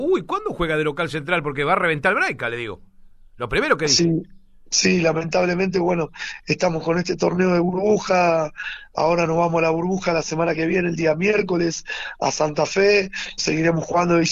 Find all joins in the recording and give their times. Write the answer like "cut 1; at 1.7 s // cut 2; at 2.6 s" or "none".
cut 1; at 13.4 s